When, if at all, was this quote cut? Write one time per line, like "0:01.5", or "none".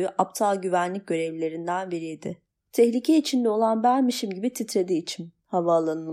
0:02.6